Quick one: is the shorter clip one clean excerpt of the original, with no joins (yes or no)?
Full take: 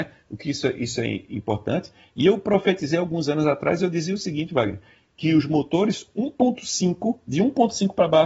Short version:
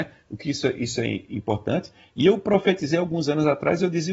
yes